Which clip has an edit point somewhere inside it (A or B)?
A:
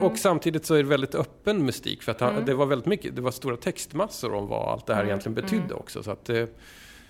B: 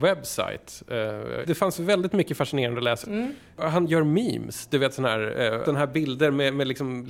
B